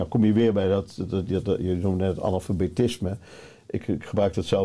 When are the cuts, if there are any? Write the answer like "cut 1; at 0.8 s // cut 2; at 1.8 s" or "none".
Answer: none

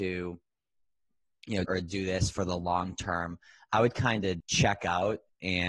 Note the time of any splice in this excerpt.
cut 1; at 1.6 s // cut 2; at 4.4 s

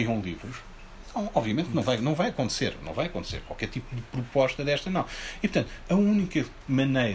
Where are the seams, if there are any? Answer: none

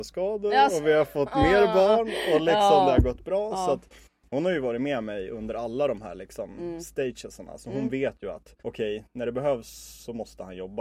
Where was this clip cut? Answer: cut 1; at 8.6 s

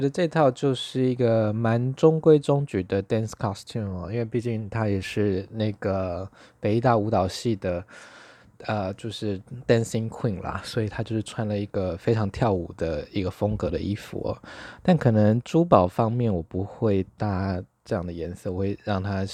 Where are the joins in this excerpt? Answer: none

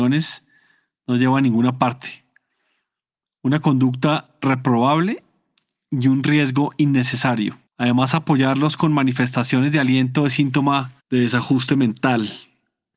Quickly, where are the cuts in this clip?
cut 1; at 7.7 s // cut 2; at 11.0 s

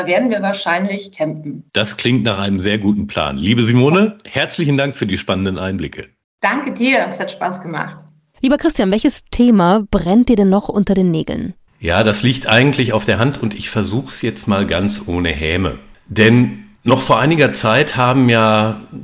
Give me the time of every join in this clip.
cut 1; at 1.7 s

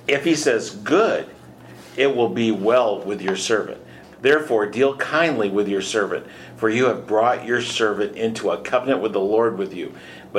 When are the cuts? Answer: cut 1; at 4.0 s

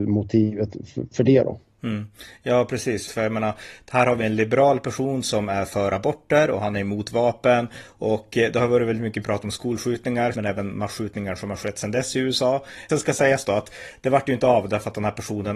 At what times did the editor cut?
cut 1; at 3.1 s // cut 2; at 10.3 s // cut 3; at 12.9 s

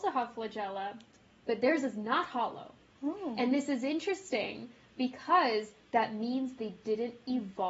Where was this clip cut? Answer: cut 1; at 2.9 s

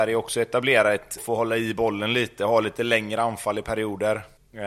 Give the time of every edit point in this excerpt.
cut 1; at 1.2 s

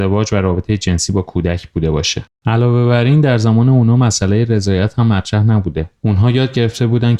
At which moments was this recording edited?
cut 1; at 6.0 s

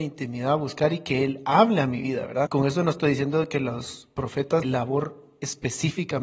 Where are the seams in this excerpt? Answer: cut 1; at 2.5 s // cut 2; at 4.6 s

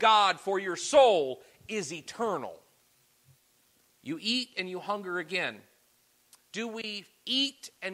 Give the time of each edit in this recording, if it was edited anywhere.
cut 1; at 3.9 s // cut 2; at 6.4 s

